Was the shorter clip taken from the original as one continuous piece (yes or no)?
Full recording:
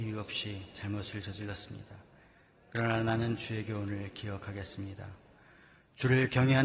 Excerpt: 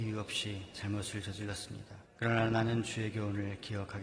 no